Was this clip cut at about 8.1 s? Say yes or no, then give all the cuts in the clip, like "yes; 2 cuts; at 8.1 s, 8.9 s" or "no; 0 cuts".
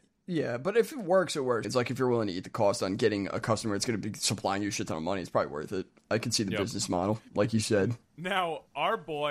yes; 2 cuts; at 1.6 s, 8.1 s